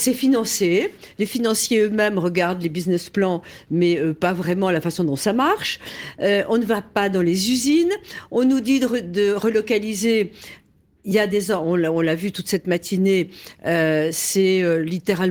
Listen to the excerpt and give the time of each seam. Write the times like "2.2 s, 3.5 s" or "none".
none